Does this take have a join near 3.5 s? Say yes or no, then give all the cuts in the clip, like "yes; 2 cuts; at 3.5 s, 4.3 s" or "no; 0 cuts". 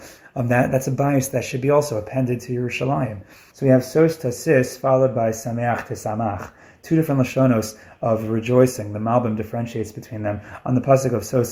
yes; 1 cut; at 3.5 s